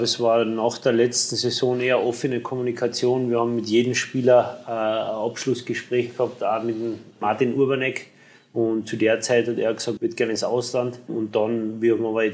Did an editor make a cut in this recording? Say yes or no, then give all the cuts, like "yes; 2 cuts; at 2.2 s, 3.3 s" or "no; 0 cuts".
yes; 1 cut; at 10.0 s